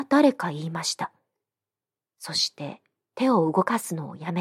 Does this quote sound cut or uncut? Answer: cut